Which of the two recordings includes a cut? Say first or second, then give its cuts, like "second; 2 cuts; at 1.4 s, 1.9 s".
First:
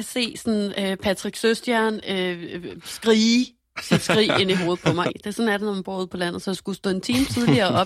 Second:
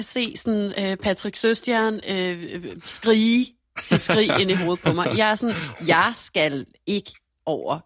first; 1 cut; at 5.1 s